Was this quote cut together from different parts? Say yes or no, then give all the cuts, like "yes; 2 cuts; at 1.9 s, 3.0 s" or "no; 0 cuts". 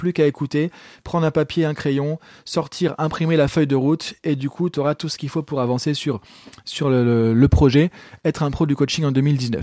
no; 0 cuts